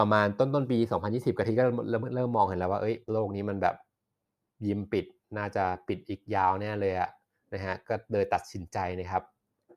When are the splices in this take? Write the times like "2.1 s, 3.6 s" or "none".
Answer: 3.0 s